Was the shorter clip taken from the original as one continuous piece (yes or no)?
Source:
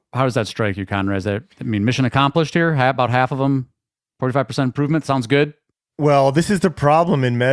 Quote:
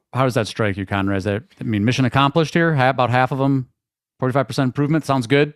yes